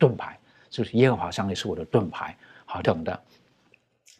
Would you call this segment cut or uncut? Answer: cut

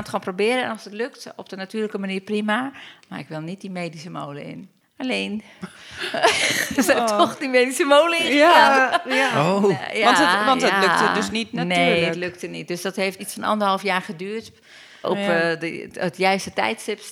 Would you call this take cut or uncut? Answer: cut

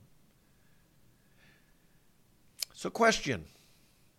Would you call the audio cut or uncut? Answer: uncut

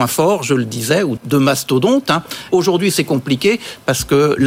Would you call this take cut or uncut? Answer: cut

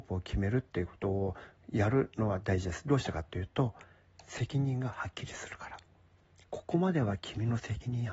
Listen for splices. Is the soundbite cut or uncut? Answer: uncut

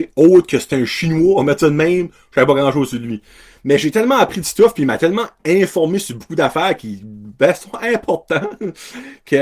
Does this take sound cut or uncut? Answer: uncut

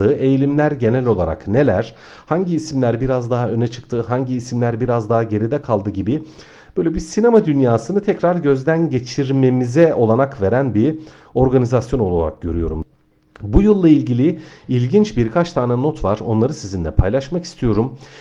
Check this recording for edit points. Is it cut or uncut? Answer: uncut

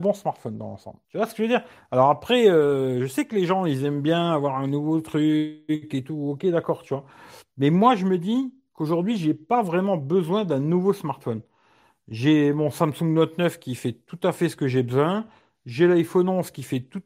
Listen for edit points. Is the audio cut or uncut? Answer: cut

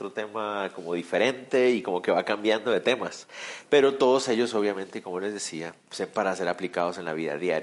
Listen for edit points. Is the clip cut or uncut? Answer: cut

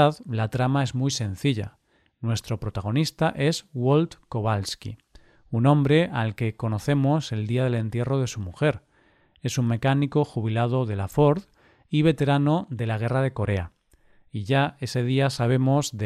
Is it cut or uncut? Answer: uncut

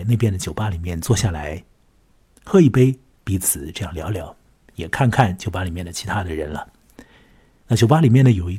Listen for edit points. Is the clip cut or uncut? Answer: uncut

